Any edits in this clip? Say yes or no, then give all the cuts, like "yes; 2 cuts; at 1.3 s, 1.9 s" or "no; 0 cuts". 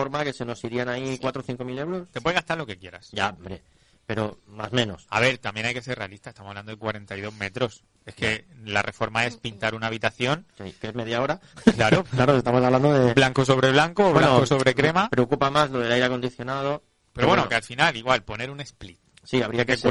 no; 0 cuts